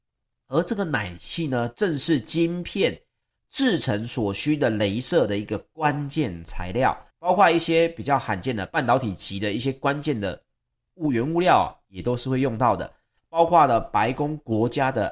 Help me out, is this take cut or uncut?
cut